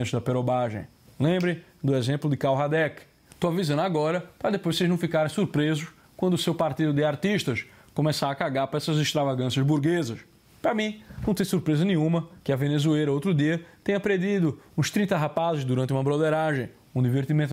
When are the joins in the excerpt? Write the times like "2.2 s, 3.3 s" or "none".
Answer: none